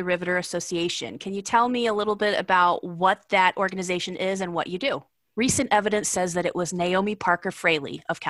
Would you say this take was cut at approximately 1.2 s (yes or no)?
no